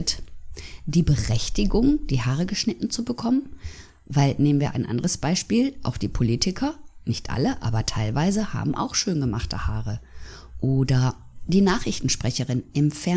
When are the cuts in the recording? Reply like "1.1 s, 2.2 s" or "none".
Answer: none